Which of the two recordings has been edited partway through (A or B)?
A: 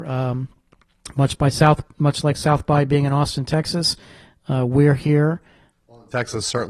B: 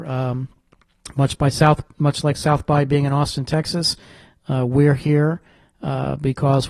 A